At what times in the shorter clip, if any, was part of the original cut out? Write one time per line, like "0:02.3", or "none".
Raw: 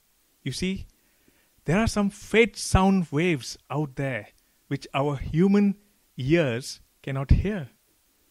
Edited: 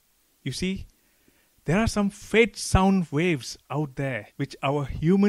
0:04.3